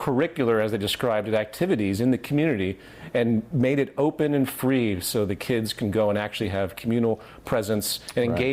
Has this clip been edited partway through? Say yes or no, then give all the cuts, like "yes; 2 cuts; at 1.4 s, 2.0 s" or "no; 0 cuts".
no; 0 cuts